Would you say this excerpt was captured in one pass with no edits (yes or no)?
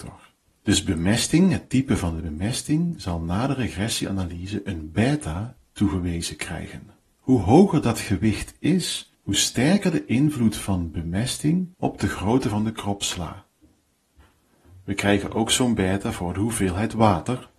no